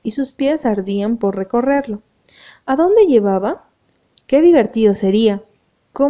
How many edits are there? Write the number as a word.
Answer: one